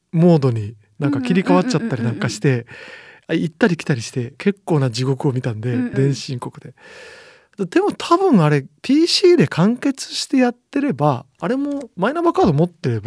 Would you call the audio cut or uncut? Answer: cut